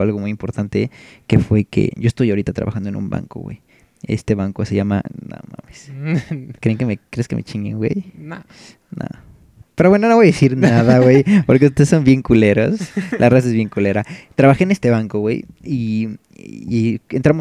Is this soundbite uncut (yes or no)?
yes